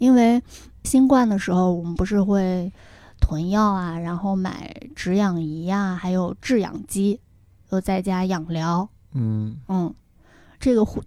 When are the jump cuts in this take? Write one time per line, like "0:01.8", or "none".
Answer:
none